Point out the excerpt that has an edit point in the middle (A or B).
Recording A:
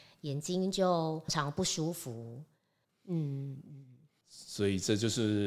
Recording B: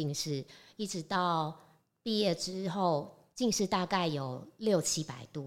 A